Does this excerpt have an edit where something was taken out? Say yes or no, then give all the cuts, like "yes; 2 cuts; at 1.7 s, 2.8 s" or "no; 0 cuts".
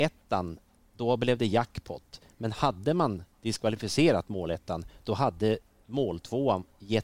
no; 0 cuts